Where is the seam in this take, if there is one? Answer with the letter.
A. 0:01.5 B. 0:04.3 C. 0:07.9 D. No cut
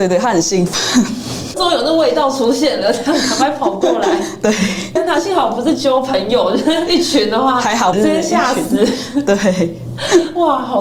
C